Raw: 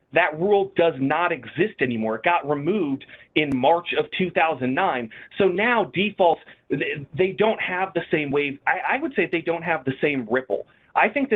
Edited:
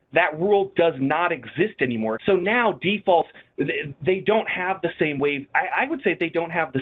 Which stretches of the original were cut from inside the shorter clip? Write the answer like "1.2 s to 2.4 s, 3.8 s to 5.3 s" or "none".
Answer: 2.2 s to 5.3 s